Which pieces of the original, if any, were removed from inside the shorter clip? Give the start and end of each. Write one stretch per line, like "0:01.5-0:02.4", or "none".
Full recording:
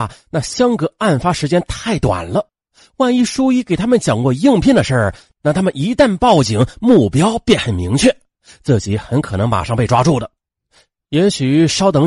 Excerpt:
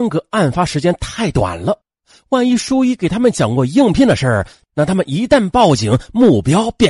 none